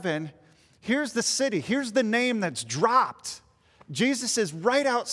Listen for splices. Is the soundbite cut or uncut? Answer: uncut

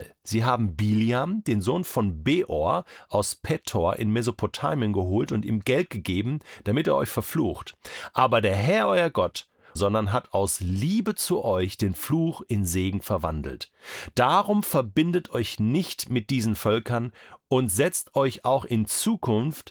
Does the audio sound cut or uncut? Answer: cut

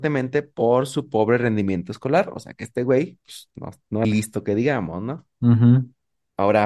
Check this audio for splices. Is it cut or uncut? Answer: cut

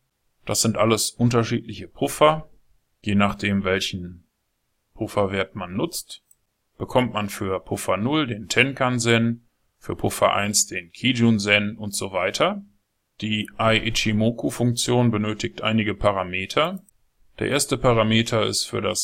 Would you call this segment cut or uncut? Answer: uncut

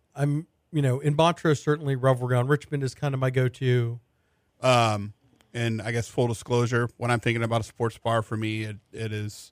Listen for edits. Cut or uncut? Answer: cut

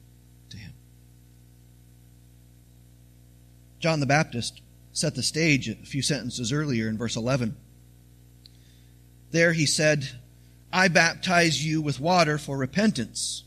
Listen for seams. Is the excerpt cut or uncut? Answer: uncut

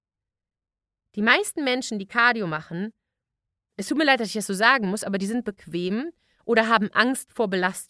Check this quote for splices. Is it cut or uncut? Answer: uncut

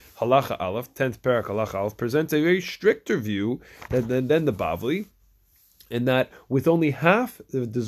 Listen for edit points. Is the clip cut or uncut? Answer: uncut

